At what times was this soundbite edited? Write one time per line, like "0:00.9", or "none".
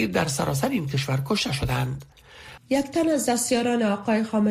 0:02.6